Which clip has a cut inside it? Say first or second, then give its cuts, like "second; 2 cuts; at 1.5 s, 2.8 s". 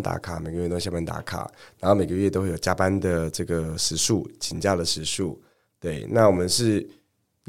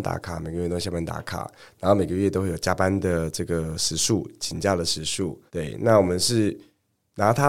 second; 1 cut; at 5.5 s